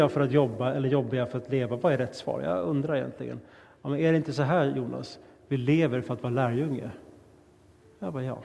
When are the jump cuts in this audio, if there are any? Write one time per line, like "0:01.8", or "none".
none